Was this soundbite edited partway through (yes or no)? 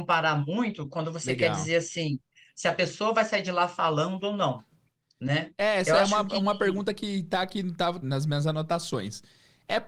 yes